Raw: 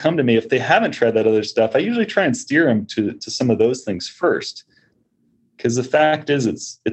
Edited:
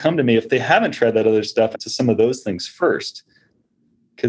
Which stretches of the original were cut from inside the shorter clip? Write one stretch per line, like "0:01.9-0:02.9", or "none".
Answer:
0:01.7-0:03.1